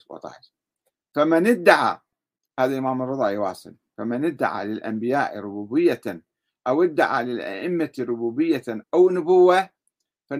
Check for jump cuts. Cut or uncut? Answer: cut